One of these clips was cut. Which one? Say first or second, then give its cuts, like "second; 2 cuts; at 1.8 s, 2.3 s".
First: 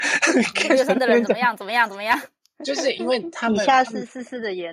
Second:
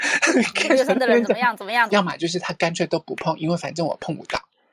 second; 1 cut; at 1.9 s